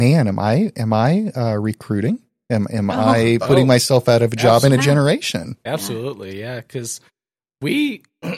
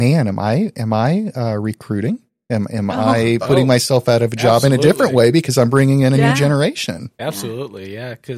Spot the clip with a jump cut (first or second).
first